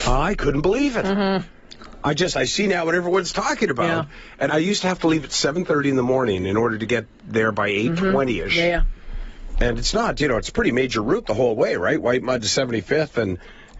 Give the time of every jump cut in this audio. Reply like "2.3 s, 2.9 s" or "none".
4.5 s